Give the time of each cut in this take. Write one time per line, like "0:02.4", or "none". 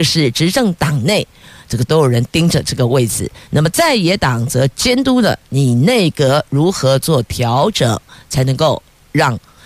none